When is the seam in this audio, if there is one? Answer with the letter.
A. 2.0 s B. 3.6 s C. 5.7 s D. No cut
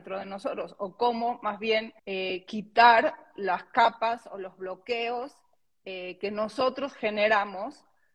A